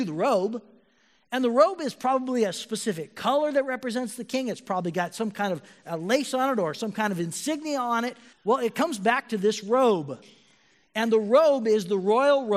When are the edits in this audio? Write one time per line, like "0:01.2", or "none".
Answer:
0:08.3